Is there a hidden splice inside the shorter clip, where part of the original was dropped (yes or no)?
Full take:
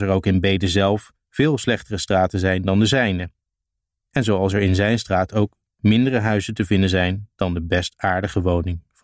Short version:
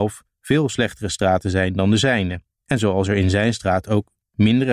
yes